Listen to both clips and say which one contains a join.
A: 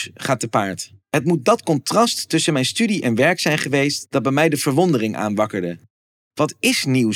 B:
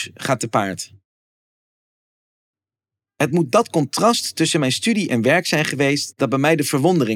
A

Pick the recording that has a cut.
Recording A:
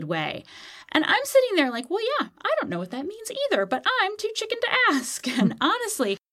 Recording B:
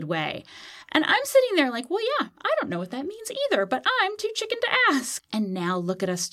B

